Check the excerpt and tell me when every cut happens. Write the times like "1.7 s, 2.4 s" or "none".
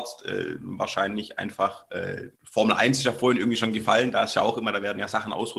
2.3 s

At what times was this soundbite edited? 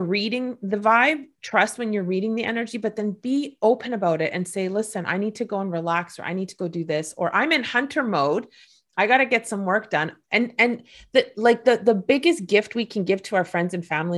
none

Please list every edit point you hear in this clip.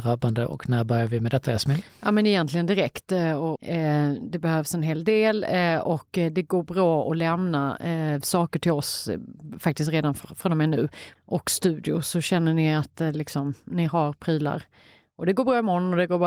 3.6 s, 11.2 s

